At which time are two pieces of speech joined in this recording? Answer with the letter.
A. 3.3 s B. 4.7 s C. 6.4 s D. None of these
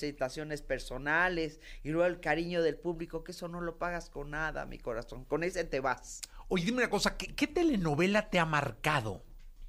D